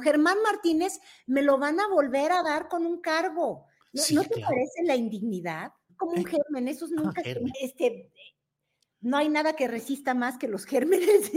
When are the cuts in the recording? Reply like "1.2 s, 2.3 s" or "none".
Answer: 5.9 s, 7.5 s